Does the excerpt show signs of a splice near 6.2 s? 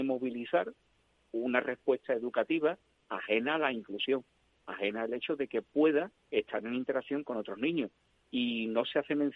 yes; 2 cuts; at 4.5 s, 6.2 s

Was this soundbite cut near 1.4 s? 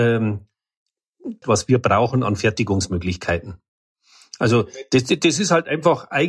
yes; 1 cut; at 1.4 s

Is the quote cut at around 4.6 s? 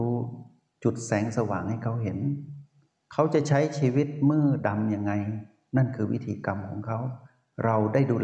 yes; 1 cut; at 4.6 s

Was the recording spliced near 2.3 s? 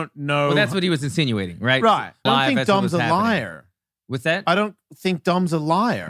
yes; 1 cut; at 2.3 s

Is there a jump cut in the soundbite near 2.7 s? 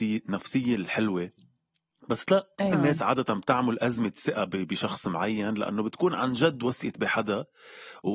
yes; 1 cut; at 2.7 s

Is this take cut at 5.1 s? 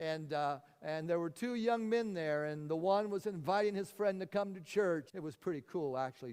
yes; 1 cut; at 5.1 s

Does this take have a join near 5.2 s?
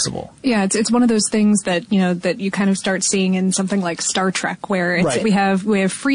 yes; 1 cut; at 5.2 s

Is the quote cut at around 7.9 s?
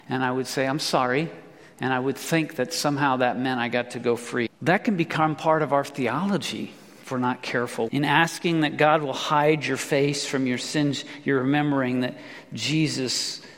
yes; 2 cuts; at 4.5 s, 7.9 s

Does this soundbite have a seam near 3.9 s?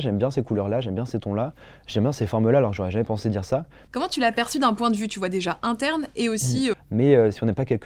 yes; 2 cuts; at 3.9 s, 6.7 s

